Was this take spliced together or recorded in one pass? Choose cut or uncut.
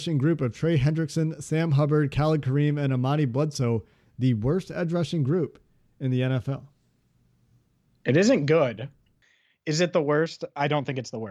uncut